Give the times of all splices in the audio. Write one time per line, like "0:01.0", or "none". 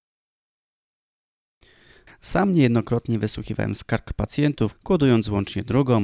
0:02.1
0:04.7